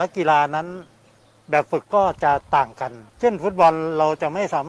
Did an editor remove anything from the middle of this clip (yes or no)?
yes